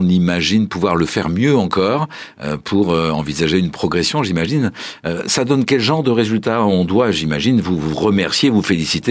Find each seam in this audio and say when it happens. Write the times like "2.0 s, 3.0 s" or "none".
none